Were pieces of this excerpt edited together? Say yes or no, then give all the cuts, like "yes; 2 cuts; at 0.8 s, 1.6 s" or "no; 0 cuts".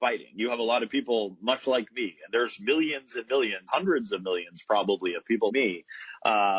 yes; 2 cuts; at 3.7 s, 5.5 s